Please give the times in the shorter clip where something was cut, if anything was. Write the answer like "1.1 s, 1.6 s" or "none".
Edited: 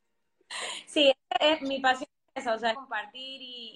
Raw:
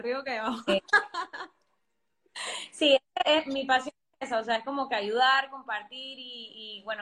2.7 s